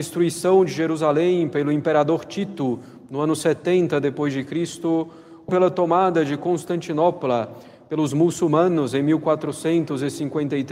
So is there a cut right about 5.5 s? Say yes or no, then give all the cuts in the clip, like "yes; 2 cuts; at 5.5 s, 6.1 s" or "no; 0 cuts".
yes; 1 cut; at 5.5 s